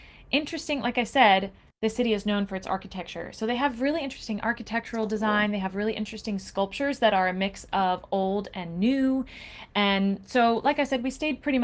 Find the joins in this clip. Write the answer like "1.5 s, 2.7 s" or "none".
none